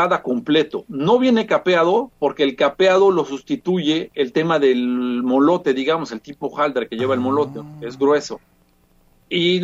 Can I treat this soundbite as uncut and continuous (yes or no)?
yes